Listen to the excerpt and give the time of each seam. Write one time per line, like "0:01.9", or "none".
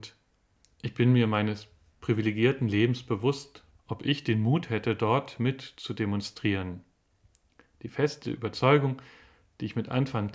0:03.7